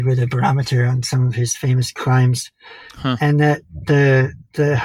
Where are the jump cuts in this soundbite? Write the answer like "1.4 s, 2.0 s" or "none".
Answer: none